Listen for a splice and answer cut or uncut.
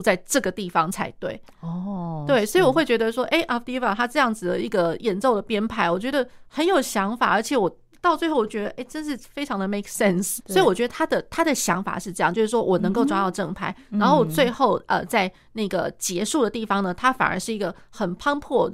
cut